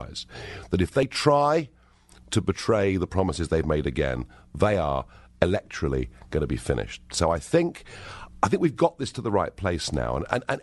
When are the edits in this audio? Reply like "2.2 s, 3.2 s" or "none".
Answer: none